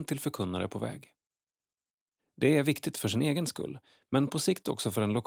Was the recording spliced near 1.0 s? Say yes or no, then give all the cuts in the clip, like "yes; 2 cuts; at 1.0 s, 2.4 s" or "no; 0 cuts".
no; 1 cut; at 2.2 s